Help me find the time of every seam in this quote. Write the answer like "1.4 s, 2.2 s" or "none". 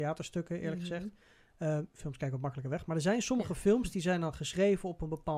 none